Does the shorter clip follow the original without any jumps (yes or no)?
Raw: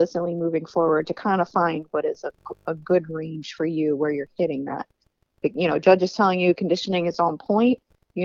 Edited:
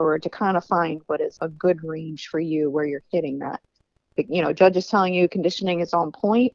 no